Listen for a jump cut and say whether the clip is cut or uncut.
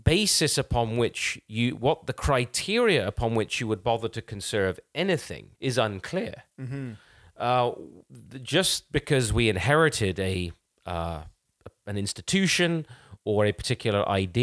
cut